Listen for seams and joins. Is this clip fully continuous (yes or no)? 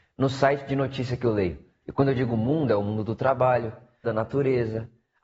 no